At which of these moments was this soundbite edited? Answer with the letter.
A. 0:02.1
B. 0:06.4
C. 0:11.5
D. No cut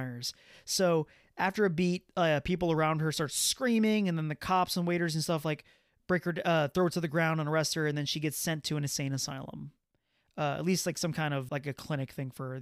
C